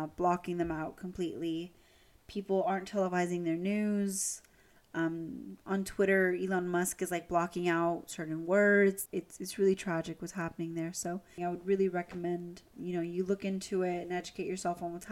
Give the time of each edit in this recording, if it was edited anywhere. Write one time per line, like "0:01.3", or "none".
0:09.1
0:11.4
0:12.7